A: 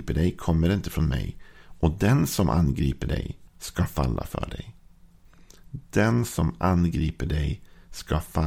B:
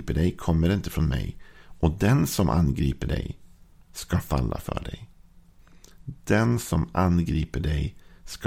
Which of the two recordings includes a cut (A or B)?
A